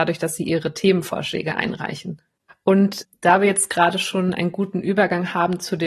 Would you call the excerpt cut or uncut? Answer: cut